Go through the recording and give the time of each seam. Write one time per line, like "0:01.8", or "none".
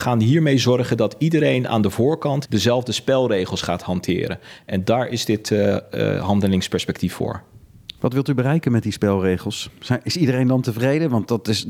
0:02.4